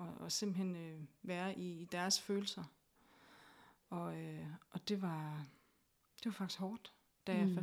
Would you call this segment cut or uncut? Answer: uncut